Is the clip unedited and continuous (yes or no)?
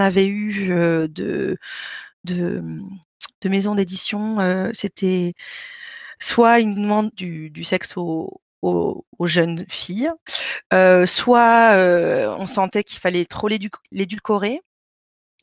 no